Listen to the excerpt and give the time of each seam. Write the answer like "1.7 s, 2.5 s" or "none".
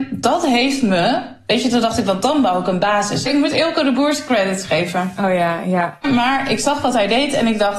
3.3 s, 6.0 s